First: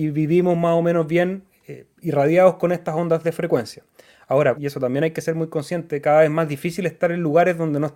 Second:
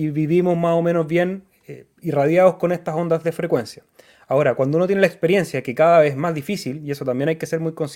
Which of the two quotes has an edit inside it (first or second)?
first